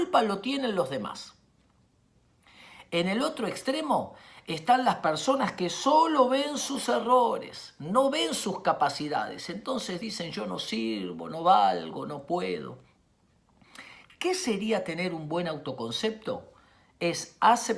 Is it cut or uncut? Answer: uncut